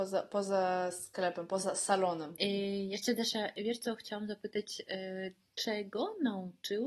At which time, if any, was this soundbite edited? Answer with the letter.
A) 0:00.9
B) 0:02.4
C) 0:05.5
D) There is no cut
B